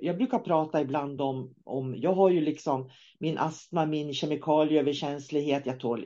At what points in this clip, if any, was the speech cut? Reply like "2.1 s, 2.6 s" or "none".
none